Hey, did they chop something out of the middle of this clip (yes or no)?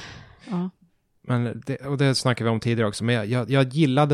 no